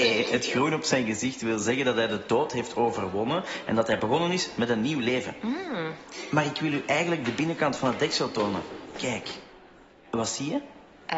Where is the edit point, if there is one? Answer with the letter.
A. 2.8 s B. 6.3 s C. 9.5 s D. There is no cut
D